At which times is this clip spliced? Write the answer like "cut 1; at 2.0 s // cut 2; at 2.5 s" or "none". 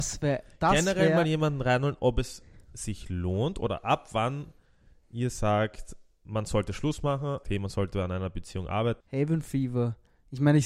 cut 1; at 7.4 s // cut 2; at 9.0 s